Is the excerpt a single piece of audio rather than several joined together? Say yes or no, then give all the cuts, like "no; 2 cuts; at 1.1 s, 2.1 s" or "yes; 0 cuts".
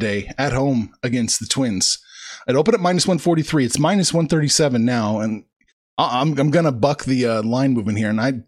yes; 0 cuts